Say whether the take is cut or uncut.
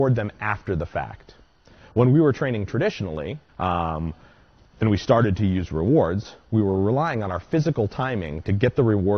cut